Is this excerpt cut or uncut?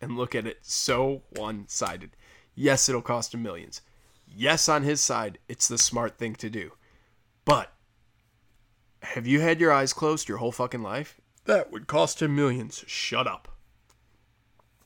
cut